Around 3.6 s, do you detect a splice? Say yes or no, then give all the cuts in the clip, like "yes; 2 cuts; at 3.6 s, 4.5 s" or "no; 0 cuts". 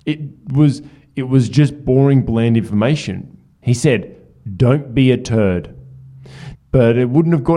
yes; 2 cuts; at 3.6 s, 6.5 s